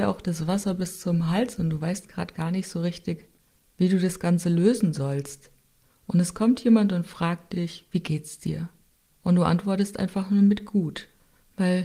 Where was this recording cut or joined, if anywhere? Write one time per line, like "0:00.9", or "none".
none